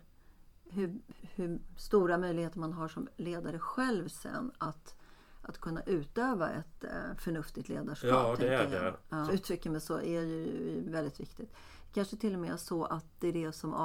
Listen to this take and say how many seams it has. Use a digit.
2